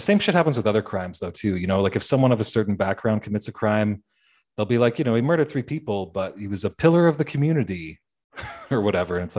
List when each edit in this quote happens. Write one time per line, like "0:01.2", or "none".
none